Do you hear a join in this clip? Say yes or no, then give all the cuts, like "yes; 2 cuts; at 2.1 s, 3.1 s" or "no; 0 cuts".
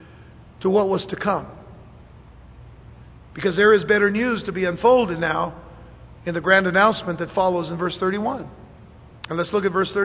no; 0 cuts